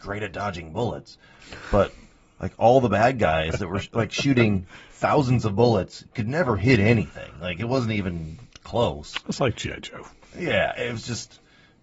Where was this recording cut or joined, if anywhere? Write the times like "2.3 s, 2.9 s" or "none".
none